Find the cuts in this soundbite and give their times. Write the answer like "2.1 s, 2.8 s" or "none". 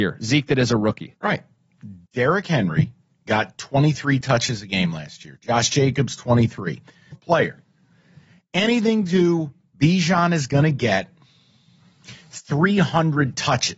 7.1 s